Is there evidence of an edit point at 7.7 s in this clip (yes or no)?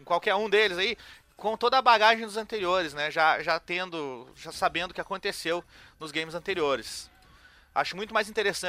yes